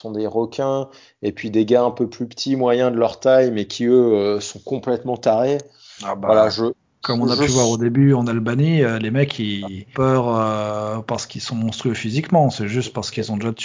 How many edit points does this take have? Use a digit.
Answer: 1